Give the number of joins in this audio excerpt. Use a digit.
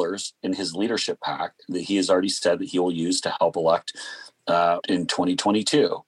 1